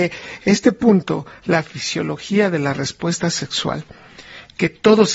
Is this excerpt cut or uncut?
uncut